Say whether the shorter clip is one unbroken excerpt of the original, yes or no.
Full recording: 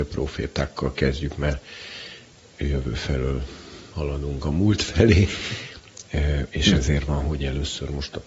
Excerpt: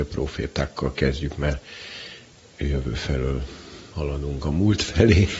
yes